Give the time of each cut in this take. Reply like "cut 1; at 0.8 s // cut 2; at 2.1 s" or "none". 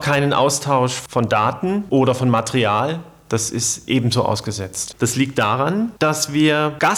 cut 1; at 4.9 s